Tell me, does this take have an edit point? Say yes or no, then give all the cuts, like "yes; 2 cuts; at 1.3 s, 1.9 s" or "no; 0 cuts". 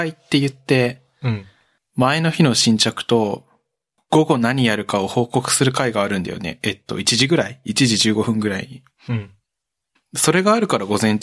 no; 0 cuts